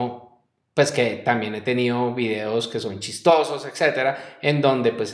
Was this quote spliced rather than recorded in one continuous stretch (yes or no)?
no